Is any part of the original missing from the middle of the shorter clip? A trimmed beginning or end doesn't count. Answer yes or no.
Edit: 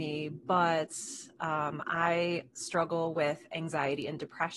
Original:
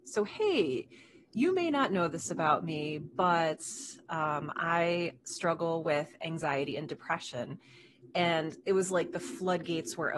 no